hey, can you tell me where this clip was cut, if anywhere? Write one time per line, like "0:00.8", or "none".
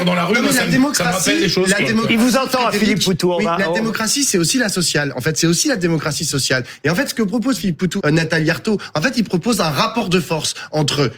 0:08.0

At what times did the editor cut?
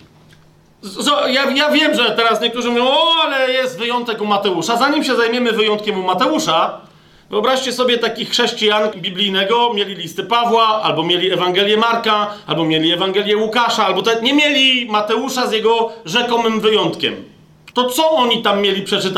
0:08.9
0:17.7

